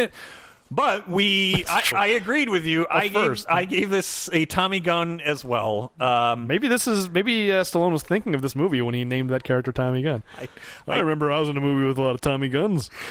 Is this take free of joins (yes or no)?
no